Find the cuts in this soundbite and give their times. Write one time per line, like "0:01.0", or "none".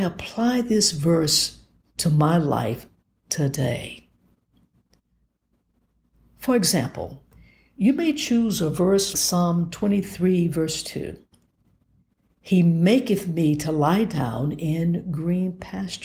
0:09.1